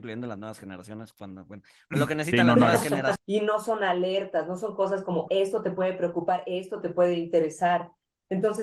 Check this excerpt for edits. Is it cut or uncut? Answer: cut